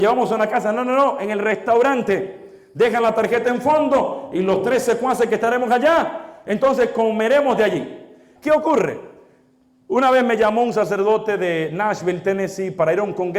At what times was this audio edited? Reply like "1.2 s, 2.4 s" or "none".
8.4 s

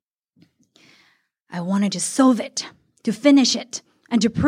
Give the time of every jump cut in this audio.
none

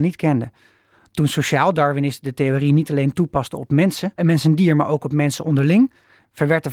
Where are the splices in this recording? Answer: 4.2 s

